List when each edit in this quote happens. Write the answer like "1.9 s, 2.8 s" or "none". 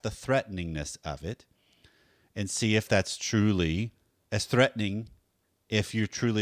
none